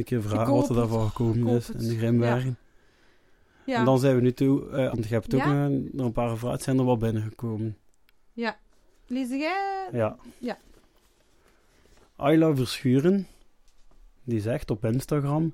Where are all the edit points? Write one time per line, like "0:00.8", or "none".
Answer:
0:04.9